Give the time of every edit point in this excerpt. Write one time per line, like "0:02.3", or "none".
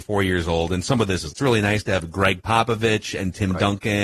0:01.3